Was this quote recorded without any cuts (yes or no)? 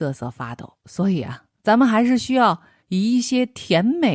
yes